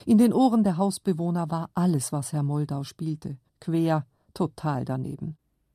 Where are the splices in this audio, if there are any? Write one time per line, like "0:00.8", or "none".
0:03.5